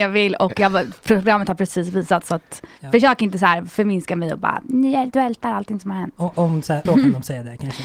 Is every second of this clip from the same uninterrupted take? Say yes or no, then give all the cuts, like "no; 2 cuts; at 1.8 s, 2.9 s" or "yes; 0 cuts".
no; 1 cut; at 6.9 s